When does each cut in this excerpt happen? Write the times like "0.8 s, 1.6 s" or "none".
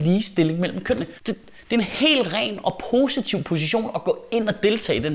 1.2 s